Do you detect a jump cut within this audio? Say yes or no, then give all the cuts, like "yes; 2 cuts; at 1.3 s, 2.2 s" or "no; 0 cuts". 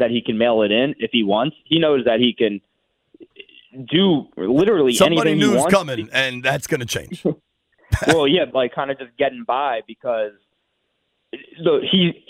yes; 1 cut; at 8.5 s